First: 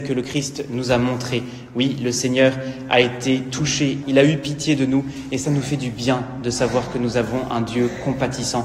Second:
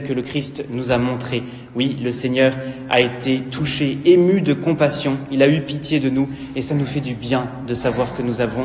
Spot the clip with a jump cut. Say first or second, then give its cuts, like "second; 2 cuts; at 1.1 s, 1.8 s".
first; 1 cut; at 4.0 s